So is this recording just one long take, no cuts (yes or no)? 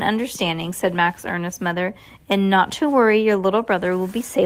yes